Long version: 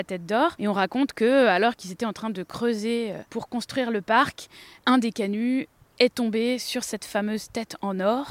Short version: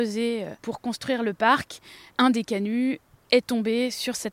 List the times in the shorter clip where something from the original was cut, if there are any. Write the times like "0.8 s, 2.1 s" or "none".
none